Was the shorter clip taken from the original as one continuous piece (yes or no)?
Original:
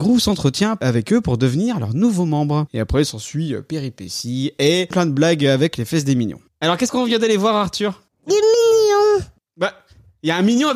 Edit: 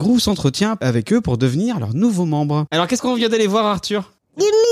no